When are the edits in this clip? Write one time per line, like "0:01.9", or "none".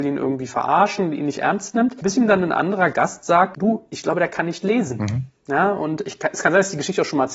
none